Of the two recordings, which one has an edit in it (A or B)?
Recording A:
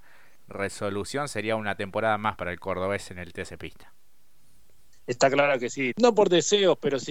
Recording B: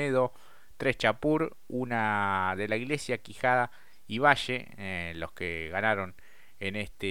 A